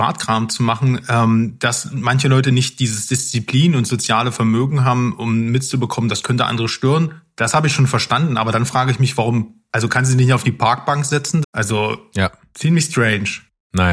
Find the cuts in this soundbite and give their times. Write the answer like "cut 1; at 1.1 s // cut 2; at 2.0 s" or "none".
cut 1; at 11.4 s